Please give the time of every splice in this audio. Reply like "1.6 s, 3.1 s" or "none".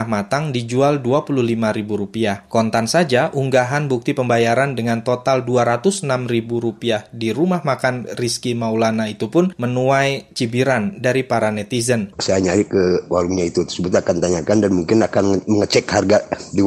12.1 s